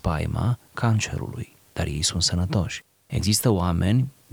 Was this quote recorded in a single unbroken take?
yes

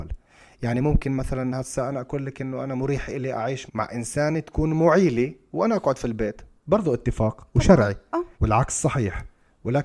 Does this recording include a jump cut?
yes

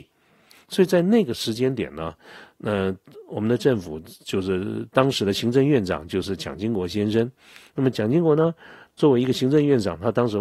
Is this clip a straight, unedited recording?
yes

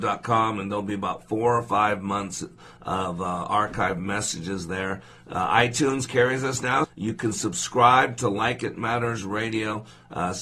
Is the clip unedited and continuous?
no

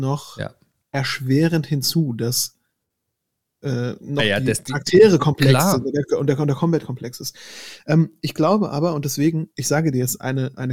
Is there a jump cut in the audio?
no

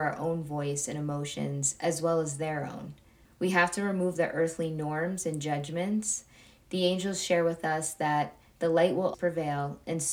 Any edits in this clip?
yes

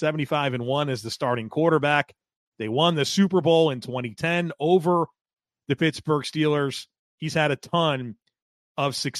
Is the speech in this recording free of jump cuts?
yes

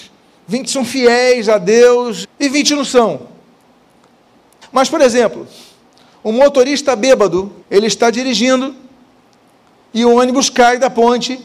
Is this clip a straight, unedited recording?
no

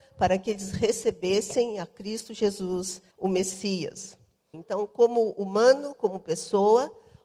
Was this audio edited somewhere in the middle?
yes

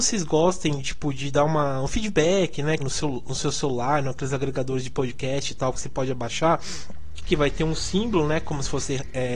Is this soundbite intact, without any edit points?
no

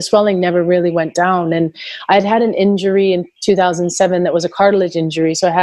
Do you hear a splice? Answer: no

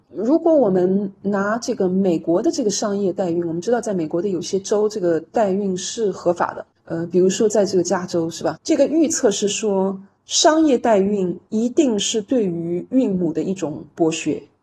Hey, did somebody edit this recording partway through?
yes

